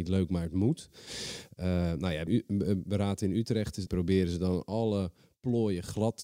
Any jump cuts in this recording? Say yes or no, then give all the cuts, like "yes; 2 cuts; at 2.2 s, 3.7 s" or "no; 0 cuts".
yes; 2 cuts; at 2.3 s, 3.9 s